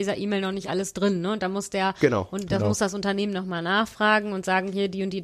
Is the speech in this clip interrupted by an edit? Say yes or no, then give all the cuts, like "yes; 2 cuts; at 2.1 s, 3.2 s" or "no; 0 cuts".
no; 0 cuts